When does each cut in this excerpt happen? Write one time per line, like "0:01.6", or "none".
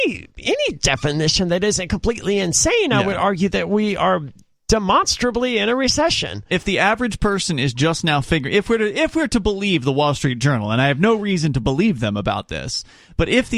none